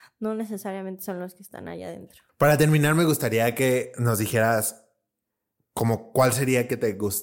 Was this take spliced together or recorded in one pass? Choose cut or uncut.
cut